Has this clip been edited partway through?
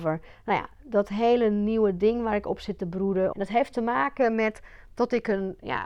yes; 1 cut; at 3.3 s

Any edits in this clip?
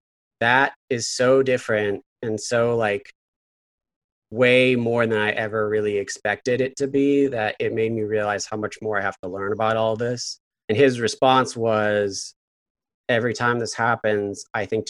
yes; 1 cut; at 10.6 s

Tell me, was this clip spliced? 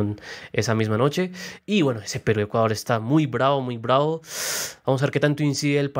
no; 0 cuts

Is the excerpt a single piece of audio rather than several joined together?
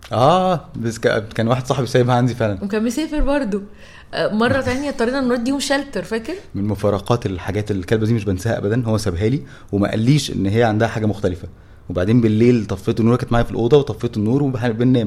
yes; 0 cuts

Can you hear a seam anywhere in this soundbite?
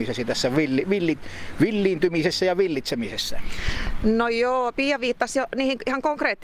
no; 0 cuts

